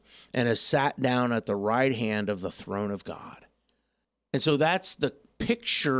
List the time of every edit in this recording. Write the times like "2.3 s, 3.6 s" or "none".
none